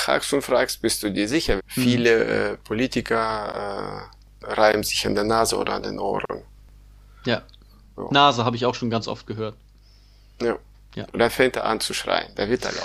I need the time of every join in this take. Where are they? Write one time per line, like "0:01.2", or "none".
0:01.6
0:11.1